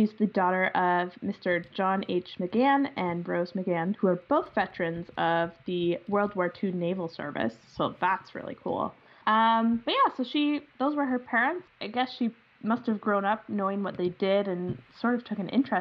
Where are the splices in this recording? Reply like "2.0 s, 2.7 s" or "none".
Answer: 9.2 s, 11.7 s